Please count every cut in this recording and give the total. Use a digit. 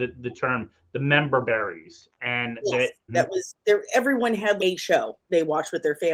2